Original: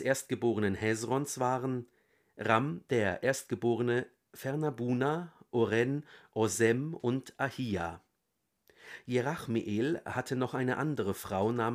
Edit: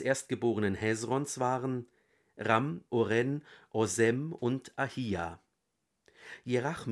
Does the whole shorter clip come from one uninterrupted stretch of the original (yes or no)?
no